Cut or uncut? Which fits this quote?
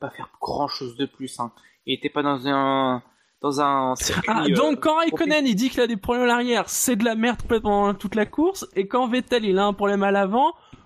uncut